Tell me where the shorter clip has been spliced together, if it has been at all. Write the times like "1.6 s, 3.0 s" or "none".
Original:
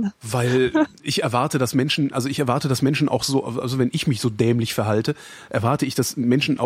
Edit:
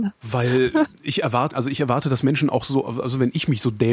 1.5 s